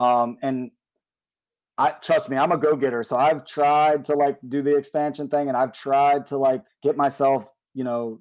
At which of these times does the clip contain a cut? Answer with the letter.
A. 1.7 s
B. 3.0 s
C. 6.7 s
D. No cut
C